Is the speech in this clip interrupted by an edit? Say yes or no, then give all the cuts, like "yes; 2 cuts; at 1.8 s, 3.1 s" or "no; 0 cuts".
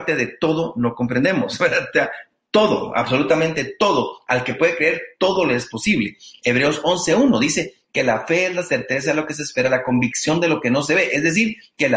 no; 0 cuts